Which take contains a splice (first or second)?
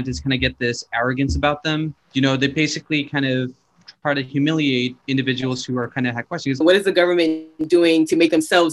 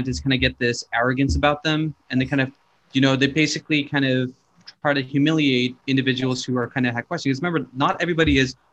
first